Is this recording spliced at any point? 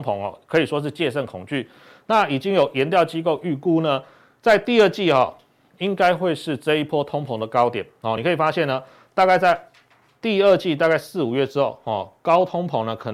no; 0 cuts

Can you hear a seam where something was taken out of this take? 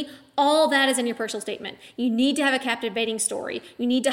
yes; 1 cut; at 1.9 s

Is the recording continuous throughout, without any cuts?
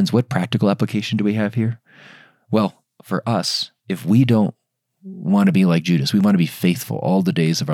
no; 1 cut; at 3.8 s

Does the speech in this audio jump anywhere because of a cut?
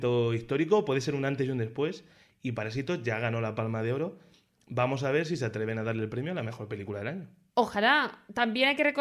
no; 0 cuts

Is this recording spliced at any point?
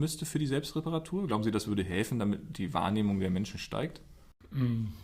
no; 0 cuts

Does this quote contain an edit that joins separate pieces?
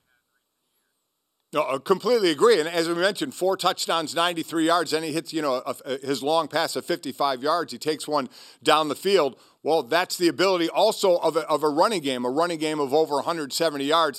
no; 0 cuts

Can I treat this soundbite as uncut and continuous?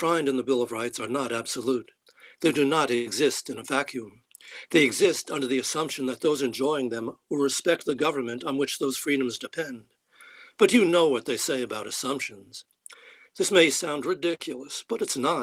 no; 1 cut; at 13.3 s

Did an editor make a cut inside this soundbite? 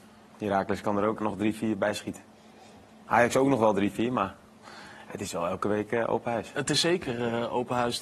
yes; 1 cut; at 1.2 s

